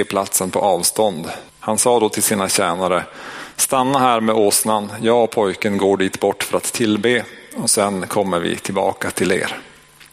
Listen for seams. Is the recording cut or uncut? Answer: cut